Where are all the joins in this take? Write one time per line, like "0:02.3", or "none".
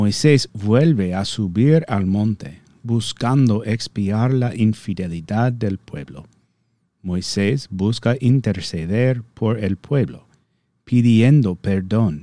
none